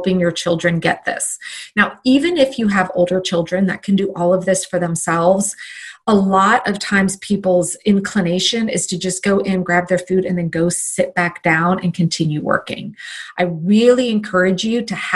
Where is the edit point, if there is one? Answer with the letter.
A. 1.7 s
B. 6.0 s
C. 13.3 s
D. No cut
D